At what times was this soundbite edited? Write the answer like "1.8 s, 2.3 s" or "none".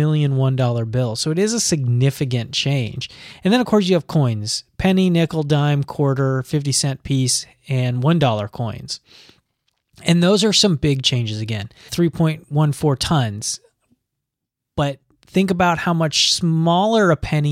11.9 s